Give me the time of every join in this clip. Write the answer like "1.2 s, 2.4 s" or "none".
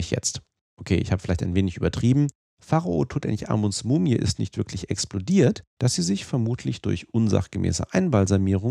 5.8 s